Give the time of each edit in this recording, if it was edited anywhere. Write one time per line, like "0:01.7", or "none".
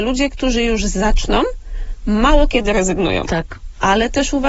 0:03.3